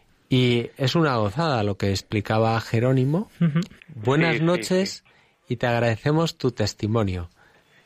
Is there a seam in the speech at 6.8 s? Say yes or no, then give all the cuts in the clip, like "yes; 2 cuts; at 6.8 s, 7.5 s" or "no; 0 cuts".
no; 1 cut; at 3.8 s